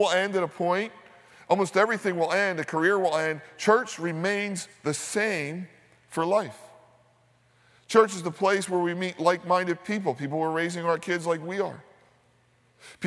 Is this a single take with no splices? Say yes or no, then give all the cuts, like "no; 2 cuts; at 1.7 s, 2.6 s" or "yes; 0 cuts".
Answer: yes; 0 cuts